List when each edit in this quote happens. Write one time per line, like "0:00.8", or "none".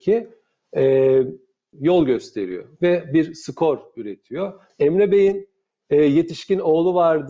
0:01.7
0:04.7